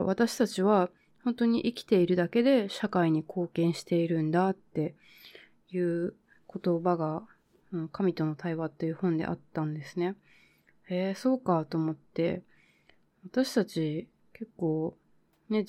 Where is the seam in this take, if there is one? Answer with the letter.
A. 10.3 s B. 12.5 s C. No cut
C